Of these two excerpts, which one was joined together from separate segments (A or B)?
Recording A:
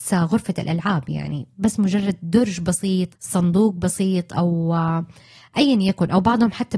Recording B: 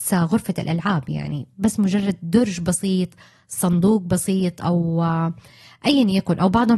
A